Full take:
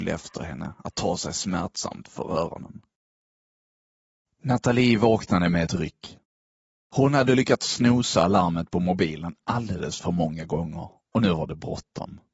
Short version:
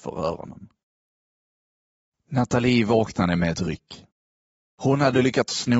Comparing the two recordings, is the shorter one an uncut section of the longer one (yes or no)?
yes